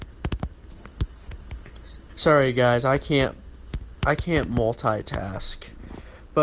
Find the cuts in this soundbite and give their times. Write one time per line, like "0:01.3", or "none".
0:02.1